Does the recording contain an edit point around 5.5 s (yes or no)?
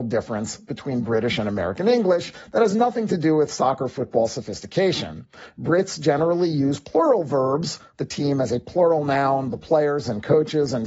no